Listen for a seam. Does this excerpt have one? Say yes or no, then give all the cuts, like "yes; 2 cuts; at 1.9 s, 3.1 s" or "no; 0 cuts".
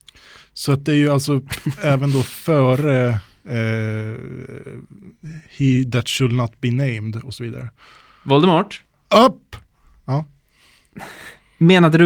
no; 0 cuts